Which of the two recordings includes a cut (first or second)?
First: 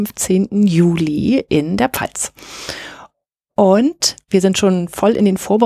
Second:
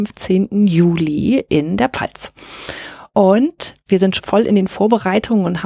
second